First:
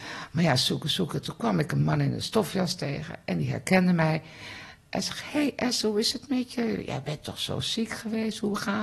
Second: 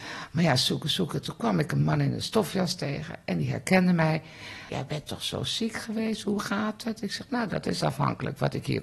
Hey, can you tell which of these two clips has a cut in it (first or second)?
second